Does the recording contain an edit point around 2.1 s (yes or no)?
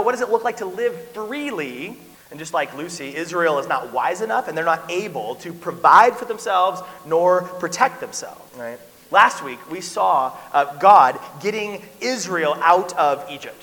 yes